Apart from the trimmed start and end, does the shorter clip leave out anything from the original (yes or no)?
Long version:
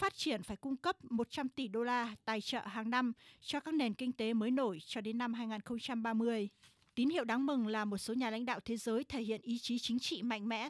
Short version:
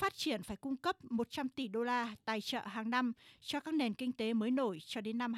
no